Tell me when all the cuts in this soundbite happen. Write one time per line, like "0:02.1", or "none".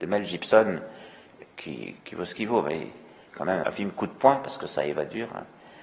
0:02.0
0:03.6